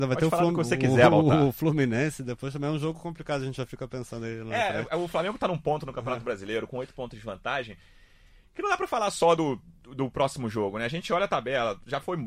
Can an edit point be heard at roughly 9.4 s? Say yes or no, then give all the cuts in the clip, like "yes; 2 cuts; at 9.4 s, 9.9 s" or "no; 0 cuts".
no; 0 cuts